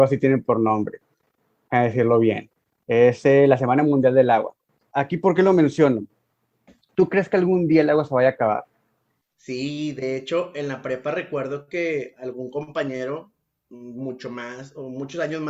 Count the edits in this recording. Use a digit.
0